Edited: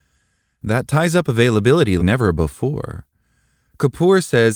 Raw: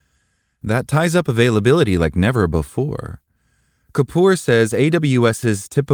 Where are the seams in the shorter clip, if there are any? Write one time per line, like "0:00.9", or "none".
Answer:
0:02.0